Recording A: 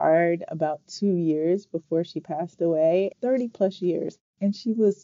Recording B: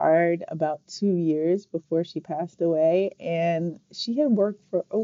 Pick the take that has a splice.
A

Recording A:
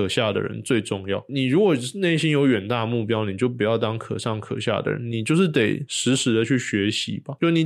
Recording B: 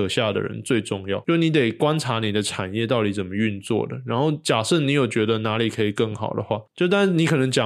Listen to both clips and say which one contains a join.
B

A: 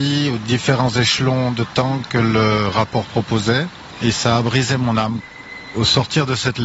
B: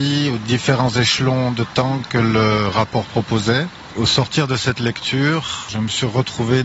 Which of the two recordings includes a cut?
B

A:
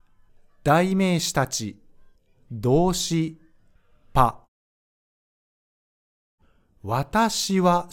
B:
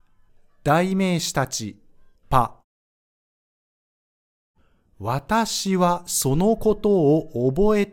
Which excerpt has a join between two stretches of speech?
B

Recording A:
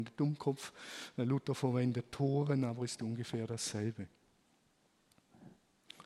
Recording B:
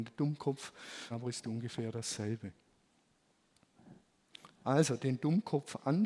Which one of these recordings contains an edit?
B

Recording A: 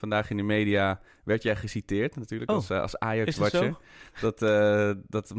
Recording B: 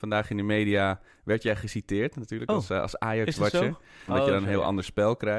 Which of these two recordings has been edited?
B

